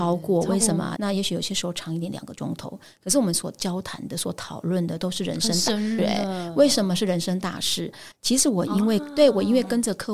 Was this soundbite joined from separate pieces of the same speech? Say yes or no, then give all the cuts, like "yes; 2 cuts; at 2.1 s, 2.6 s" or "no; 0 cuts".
yes; 3 cuts; at 1.0 s, 6.0 s, 8.1 s